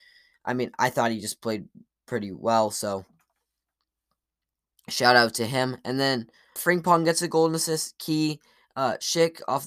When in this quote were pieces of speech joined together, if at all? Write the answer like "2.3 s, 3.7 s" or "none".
6.6 s